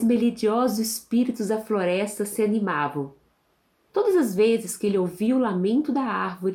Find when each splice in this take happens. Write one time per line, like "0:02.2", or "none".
0:03.9